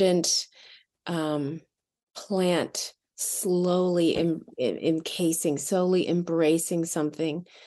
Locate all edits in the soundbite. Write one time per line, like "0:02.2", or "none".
none

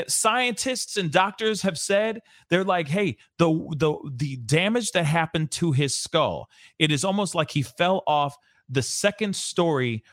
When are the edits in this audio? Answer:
none

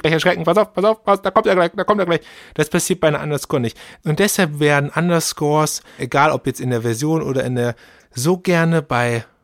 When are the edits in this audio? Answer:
0:04.0
0:06.0
0:08.0

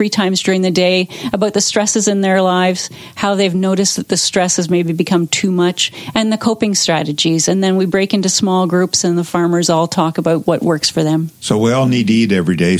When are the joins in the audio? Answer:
none

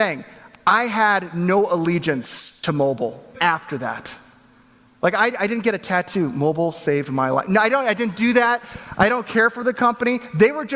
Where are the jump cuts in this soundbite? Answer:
0:03.3

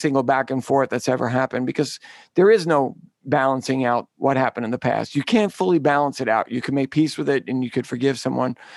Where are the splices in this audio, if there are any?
0:04.1

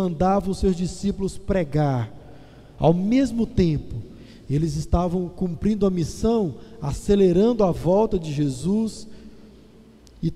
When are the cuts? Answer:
none

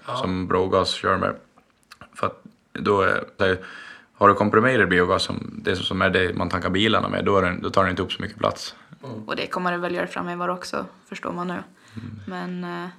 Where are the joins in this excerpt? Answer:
0:03.4
0:09.0

